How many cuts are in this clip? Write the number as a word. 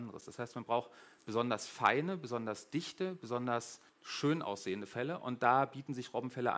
one